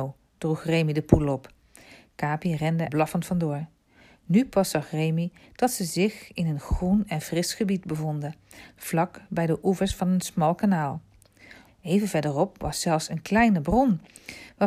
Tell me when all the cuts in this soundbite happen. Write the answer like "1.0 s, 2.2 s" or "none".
2.9 s, 11.7 s